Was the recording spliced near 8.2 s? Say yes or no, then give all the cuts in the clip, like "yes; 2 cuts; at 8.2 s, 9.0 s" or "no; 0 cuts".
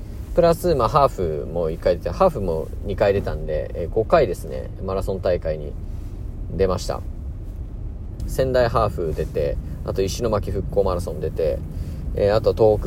yes; 1 cut; at 8.2 s